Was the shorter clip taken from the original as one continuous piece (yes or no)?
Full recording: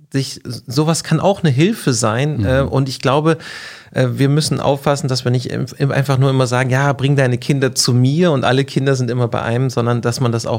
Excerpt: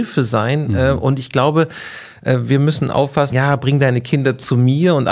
no